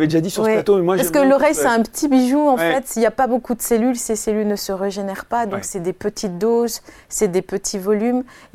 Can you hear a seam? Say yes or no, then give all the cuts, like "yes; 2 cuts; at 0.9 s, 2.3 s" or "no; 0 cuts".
no; 0 cuts